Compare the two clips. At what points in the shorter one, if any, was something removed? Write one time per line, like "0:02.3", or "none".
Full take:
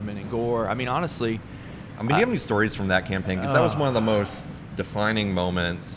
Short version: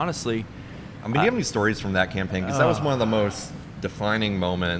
none